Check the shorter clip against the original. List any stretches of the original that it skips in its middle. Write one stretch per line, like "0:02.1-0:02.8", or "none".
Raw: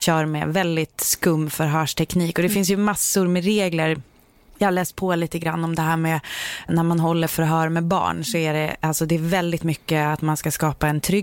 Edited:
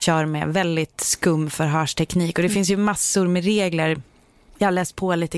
none